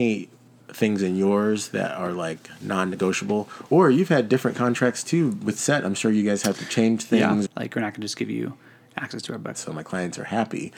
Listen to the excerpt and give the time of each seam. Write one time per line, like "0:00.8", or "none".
0:07.5
0:09.5